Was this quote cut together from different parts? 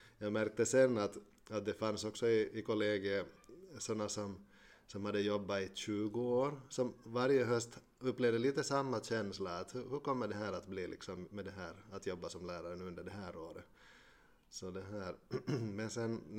no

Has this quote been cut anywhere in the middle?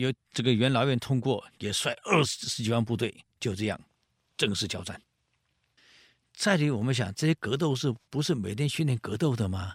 no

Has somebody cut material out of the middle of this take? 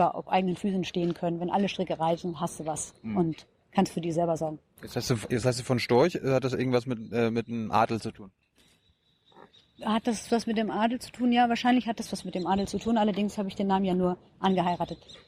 no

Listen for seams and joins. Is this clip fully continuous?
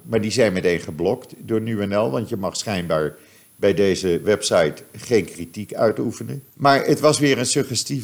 no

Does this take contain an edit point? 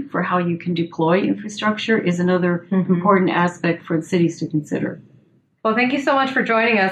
yes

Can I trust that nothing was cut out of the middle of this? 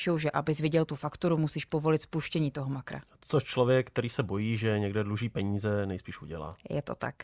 yes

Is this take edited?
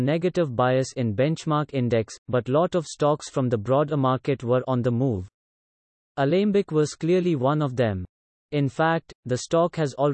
yes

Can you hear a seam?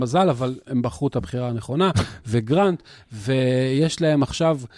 no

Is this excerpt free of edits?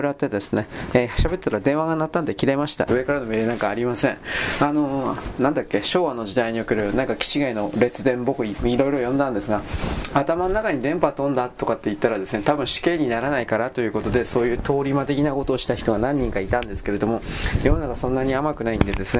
no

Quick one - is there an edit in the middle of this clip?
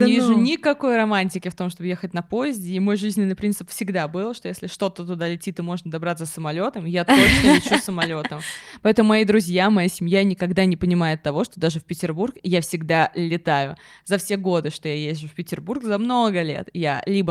no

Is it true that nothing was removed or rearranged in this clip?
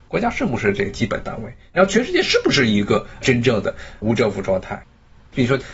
yes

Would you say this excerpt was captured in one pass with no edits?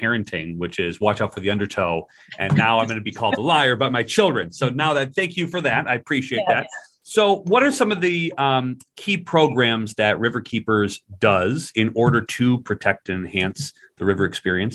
yes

